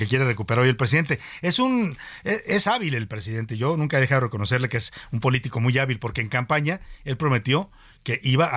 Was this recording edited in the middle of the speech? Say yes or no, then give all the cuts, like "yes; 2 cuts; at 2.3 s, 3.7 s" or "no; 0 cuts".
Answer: no; 0 cuts